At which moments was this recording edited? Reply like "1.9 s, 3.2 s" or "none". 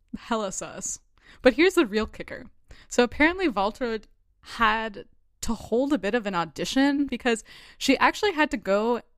7.1 s